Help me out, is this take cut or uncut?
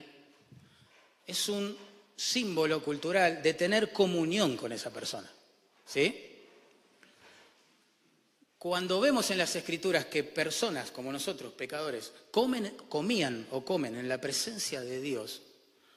uncut